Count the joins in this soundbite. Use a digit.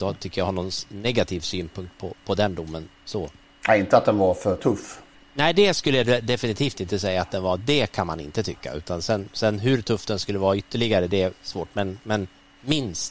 0